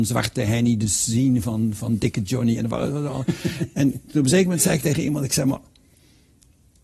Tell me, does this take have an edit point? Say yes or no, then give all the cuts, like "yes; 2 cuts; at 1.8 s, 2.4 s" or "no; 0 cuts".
no; 0 cuts